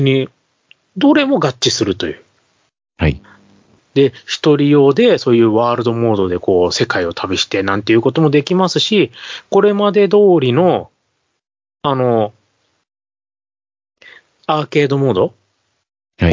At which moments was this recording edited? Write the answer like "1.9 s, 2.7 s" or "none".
3.8 s